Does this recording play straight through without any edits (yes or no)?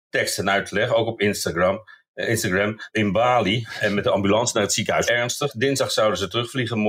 no